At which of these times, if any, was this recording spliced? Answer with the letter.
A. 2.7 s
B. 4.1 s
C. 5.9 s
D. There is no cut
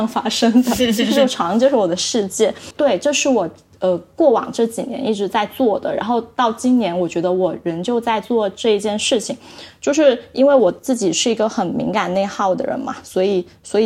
A